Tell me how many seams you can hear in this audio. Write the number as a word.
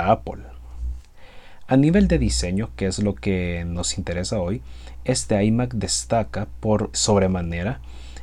one